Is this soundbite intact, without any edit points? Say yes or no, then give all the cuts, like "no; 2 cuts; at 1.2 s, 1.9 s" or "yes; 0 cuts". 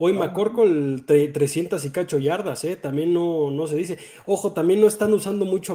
yes; 0 cuts